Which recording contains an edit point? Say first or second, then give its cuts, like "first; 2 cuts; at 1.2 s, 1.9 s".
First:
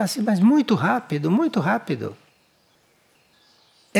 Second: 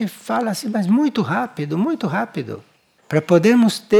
second; 1 cut; at 3.0 s